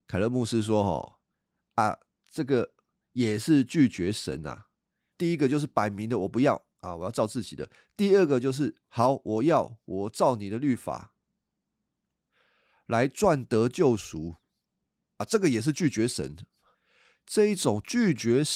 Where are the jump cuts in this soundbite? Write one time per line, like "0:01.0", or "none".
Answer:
0:05.1